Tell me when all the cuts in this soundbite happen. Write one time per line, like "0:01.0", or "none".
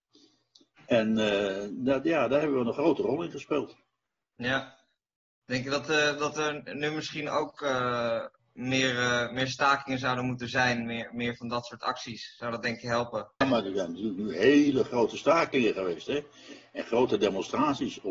none